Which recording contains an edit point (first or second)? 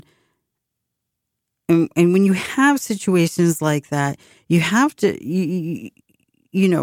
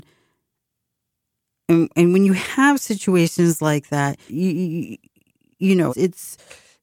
second